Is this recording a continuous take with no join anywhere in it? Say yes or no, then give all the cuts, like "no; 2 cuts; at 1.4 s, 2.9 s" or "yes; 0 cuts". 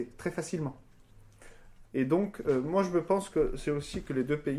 no; 1 cut; at 1.8 s